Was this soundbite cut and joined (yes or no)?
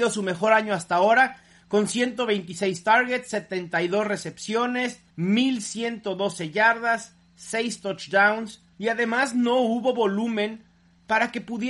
yes